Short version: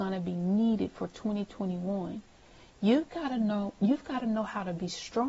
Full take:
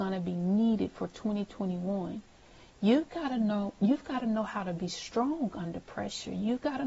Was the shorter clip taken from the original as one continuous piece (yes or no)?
yes